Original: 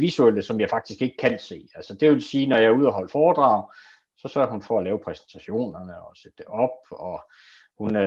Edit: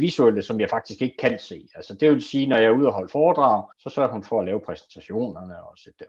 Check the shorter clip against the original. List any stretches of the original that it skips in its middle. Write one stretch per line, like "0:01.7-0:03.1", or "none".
0:03.7-0:04.1